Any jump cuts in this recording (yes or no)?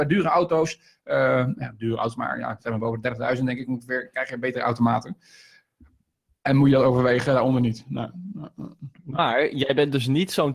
no